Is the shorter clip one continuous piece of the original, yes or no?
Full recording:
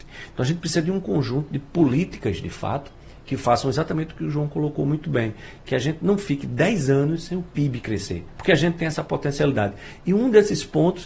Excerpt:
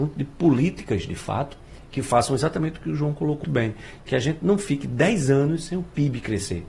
no